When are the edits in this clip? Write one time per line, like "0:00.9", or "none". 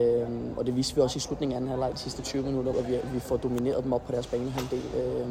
0:02.7